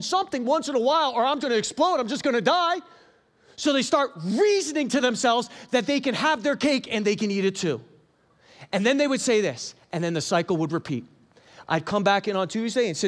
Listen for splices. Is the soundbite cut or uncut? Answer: cut